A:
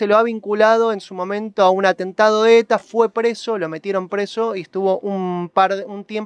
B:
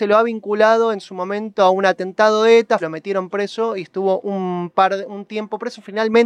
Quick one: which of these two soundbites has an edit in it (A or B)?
B